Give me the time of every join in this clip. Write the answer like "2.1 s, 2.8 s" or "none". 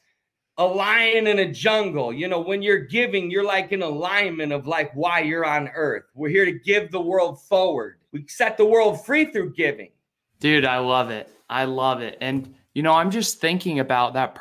8.1 s, 10.3 s